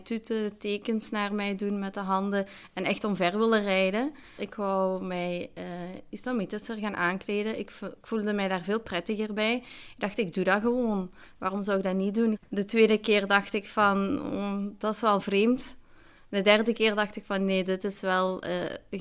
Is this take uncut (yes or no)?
no